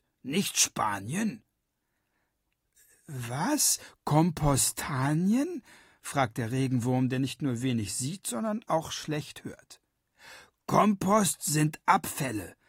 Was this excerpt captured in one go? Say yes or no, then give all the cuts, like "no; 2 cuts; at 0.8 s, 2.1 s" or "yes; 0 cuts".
yes; 0 cuts